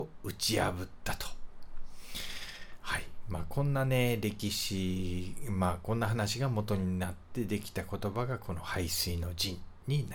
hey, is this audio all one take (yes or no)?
yes